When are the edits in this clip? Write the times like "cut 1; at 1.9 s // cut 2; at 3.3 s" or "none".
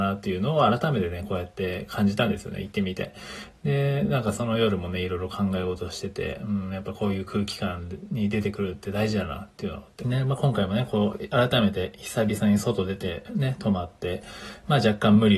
cut 1; at 10.0 s